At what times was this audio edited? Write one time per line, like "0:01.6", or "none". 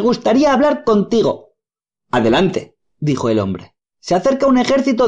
0:03.9